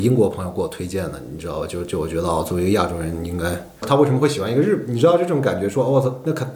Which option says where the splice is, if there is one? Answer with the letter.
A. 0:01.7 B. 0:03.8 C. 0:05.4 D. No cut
B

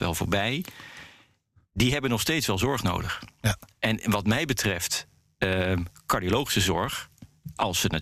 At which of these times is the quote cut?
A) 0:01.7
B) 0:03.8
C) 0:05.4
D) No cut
D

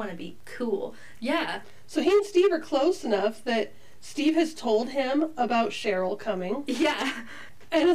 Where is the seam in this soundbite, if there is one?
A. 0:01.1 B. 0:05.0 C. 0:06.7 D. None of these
A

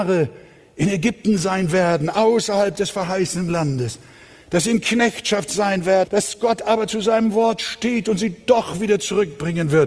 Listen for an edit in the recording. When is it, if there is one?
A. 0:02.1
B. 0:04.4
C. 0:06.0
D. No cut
C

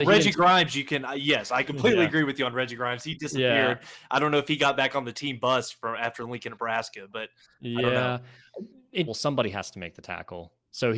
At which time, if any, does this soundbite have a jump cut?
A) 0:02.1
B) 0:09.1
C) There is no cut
B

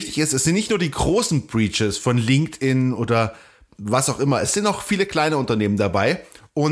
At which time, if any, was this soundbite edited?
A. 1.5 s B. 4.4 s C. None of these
C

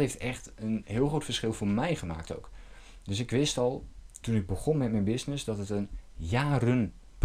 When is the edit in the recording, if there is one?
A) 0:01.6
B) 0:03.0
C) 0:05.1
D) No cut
D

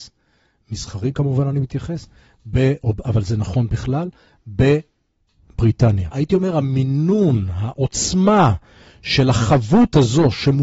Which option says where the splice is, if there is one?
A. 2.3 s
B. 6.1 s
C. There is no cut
B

